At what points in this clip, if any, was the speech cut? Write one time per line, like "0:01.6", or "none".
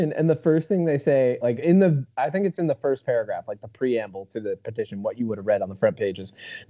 none